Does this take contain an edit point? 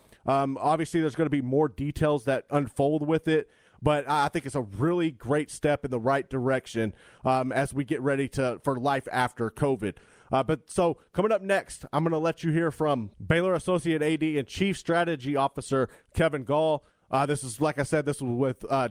no; 0 cuts

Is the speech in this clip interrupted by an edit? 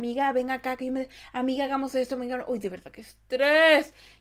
no; 0 cuts

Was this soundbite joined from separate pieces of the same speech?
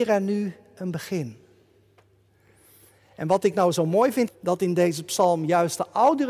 yes; 1 cut; at 4.3 s

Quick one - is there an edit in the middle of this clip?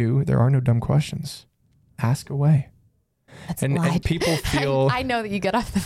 yes; 1 cut; at 4.0 s

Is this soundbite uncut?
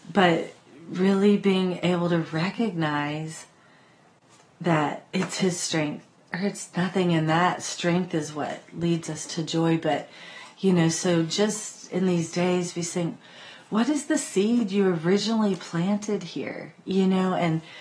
yes; 0 cuts

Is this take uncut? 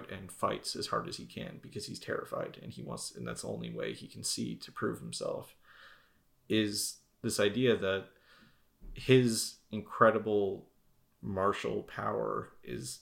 yes; 0 cuts

